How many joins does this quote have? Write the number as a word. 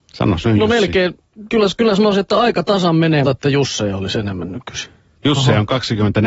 two